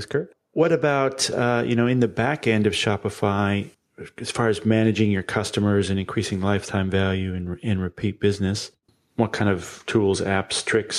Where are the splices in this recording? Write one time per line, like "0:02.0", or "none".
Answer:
none